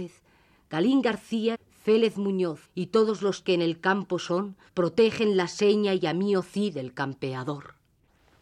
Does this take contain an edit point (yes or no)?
yes